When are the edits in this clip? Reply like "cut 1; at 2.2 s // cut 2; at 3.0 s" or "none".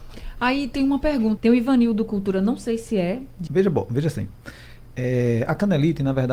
cut 1; at 1.4 s // cut 2; at 3.5 s